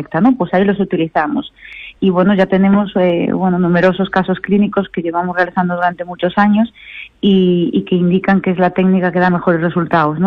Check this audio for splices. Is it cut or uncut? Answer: uncut